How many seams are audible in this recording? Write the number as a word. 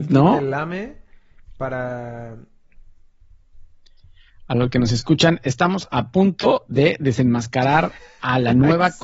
zero